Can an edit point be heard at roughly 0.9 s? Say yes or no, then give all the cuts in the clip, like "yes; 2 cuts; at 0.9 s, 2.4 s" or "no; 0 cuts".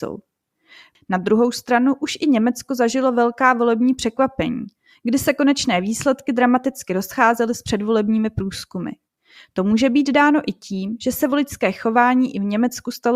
yes; 1 cut; at 0.9 s